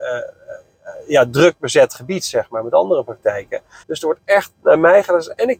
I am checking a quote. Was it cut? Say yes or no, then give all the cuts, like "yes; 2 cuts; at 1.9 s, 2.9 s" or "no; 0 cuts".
yes; 1 cut; at 3.8 s